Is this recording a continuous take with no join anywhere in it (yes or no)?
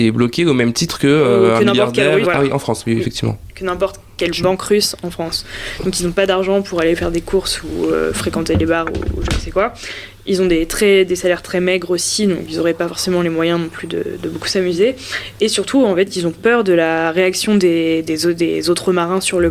no